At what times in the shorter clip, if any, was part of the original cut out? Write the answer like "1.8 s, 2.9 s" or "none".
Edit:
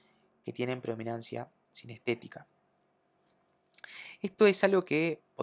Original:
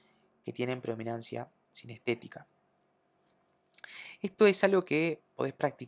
none